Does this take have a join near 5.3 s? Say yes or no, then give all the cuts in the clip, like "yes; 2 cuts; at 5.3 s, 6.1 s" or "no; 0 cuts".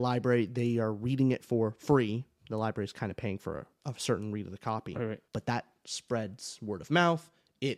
yes; 1 cut; at 5.3 s